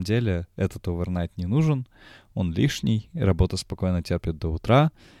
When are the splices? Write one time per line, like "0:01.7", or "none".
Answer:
none